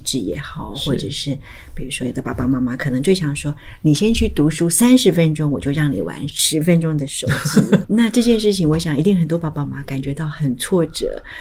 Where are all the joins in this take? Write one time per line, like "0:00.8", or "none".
0:07.8
0:09.6